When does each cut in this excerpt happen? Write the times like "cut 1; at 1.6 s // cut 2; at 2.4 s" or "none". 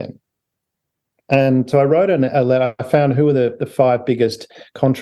none